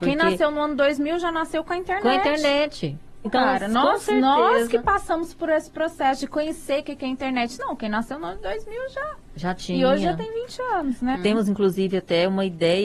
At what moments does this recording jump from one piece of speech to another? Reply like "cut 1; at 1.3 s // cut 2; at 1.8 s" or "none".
cut 1; at 3.2 s // cut 2; at 11.1 s